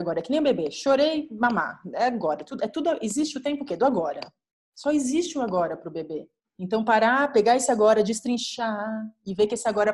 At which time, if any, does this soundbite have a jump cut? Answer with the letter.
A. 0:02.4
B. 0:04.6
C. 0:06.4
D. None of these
C